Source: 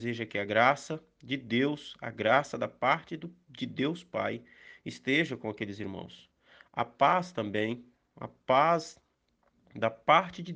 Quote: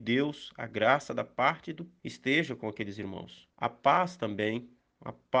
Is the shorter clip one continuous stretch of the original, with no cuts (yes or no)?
no